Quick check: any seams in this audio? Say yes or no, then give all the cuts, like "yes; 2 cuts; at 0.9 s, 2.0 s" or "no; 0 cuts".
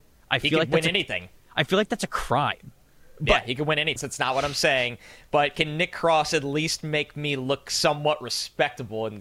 yes; 1 cut; at 4.0 s